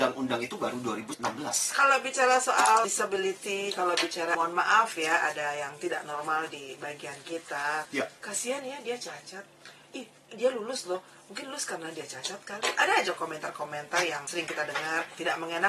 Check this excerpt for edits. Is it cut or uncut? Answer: uncut